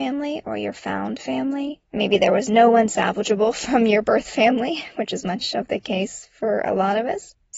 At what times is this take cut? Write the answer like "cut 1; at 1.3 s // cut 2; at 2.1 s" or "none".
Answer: none